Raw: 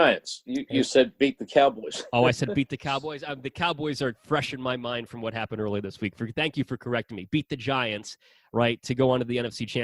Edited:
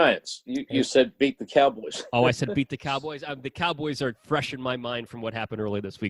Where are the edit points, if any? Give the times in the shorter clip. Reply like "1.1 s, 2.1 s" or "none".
none

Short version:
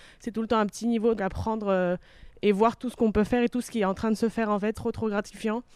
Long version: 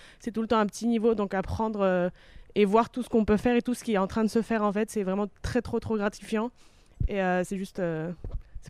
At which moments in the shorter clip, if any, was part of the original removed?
1.2 s, 4.7 s

